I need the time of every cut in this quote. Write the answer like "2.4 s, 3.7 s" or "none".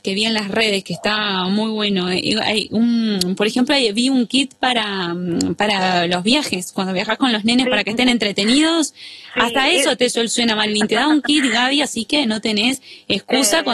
none